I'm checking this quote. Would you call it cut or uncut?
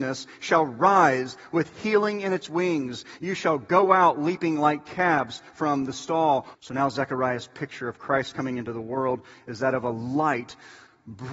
cut